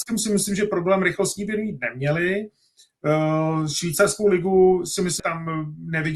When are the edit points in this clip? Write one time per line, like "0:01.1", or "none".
0:05.2